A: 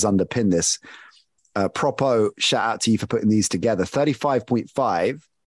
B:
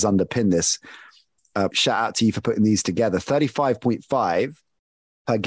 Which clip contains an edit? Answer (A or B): B